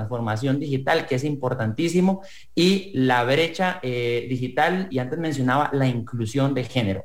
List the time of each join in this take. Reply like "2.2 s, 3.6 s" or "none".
4.9 s